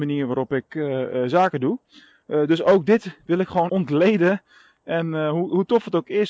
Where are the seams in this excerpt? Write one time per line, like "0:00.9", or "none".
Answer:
0:03.7